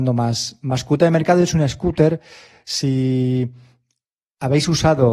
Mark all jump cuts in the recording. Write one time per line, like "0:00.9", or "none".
none